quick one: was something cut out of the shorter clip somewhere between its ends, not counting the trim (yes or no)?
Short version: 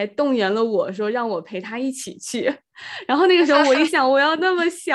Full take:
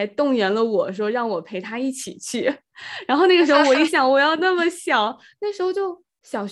no